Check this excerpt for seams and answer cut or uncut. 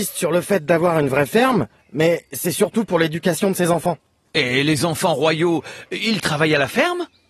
uncut